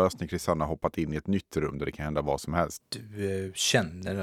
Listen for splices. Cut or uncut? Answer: cut